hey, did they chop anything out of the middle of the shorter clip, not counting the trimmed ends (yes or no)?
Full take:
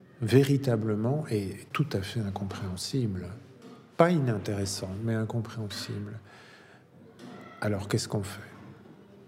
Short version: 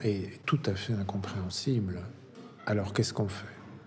yes